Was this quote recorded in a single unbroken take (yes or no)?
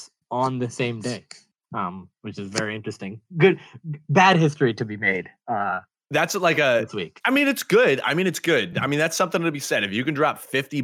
yes